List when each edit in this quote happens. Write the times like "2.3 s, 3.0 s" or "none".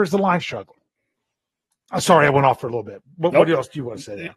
none